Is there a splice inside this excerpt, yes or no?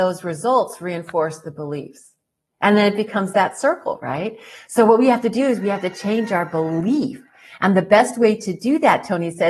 no